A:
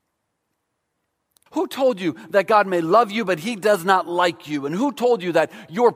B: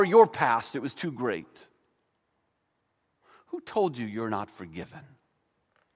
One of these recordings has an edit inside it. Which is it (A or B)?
A